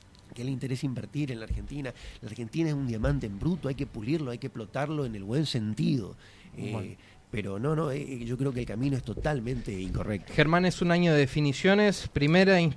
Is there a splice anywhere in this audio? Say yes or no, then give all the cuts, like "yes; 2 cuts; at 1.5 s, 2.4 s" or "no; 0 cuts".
no; 0 cuts